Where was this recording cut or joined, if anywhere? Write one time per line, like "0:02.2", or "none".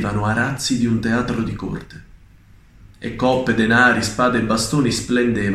none